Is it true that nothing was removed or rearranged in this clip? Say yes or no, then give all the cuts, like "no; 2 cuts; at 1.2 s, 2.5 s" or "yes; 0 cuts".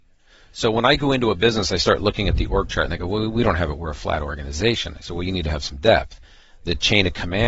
yes; 0 cuts